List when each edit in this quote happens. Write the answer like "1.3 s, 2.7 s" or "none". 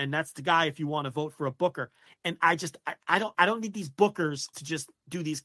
2.1 s, 3.3 s, 4.5 s